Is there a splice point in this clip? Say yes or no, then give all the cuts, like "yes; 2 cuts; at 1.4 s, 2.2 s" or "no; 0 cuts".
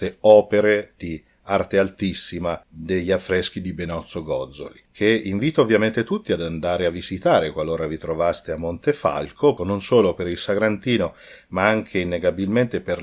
yes; 2 cuts; at 4.9 s, 9.6 s